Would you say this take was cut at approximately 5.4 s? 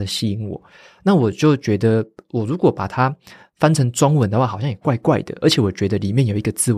no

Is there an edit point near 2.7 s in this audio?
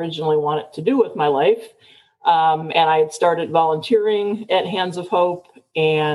no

